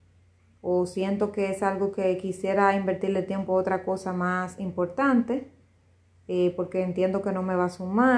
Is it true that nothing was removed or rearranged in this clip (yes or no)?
yes